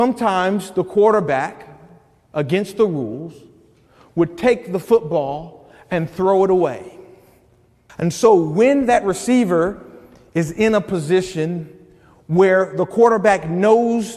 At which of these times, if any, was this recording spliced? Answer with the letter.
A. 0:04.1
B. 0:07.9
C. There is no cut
B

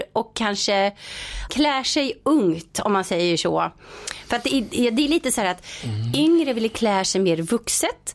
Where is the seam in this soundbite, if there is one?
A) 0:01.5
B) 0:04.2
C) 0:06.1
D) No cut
A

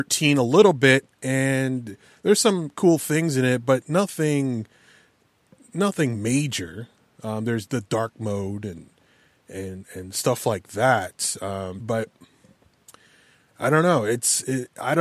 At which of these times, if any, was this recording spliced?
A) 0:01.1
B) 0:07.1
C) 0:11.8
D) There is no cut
C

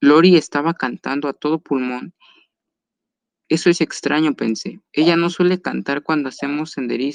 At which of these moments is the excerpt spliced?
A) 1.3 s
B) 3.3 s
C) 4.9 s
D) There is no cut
C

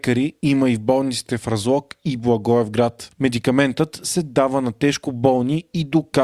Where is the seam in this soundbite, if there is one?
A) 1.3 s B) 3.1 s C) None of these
B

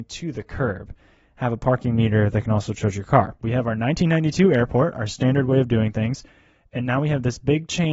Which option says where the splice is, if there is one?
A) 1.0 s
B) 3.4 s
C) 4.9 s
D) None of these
B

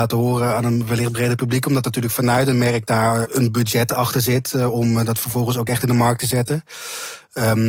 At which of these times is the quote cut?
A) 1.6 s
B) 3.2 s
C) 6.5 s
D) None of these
B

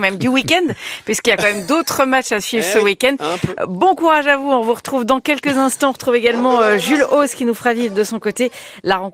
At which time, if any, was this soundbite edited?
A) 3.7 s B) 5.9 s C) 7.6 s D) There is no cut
D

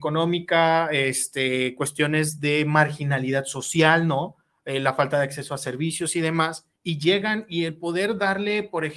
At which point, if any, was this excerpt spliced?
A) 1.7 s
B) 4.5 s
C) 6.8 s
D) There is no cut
C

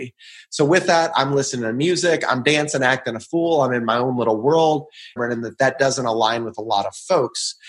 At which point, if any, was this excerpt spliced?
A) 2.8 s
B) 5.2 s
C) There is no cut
B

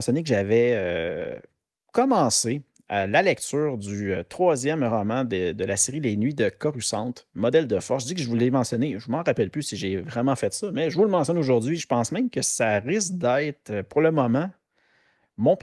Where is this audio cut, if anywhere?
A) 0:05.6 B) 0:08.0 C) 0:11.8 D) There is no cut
C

